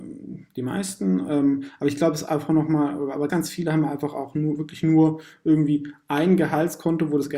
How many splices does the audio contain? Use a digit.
1